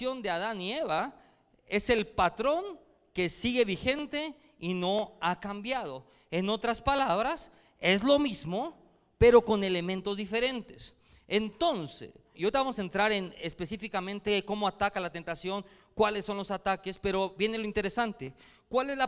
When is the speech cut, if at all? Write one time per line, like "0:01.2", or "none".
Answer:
0:12.3